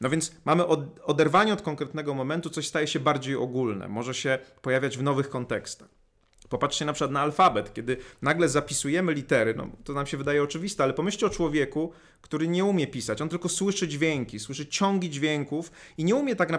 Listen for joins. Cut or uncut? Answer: uncut